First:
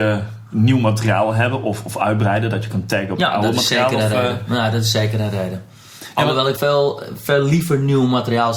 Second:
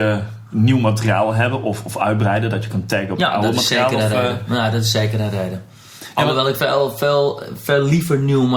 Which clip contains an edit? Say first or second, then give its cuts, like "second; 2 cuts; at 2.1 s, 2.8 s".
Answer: first; 1 cut; at 6.6 s